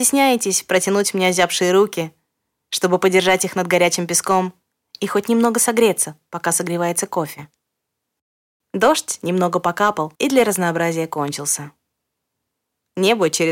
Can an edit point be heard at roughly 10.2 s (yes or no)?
yes